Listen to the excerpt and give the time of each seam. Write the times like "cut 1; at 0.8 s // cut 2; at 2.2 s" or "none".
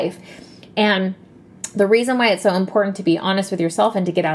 none